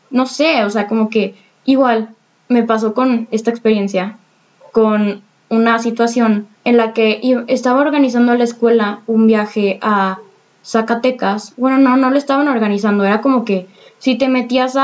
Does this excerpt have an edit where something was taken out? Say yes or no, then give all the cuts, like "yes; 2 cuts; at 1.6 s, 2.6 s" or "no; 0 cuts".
yes; 1 cut; at 6.5 s